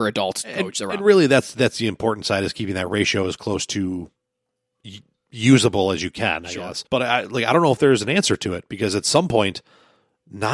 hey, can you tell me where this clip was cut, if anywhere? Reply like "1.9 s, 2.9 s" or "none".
6.9 s